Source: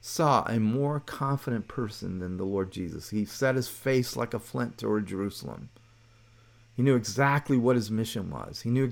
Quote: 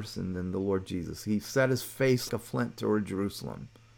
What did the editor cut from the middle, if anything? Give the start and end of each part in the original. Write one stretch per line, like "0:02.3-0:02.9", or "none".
0:04.1-0:04.3